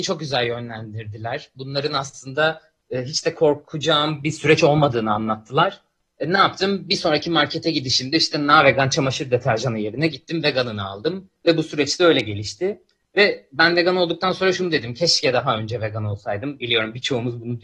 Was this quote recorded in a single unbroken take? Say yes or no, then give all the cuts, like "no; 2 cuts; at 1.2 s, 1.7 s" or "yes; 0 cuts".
yes; 0 cuts